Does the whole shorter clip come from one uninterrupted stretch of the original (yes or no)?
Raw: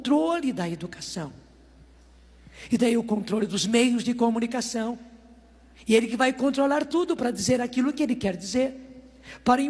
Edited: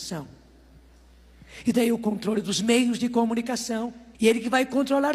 no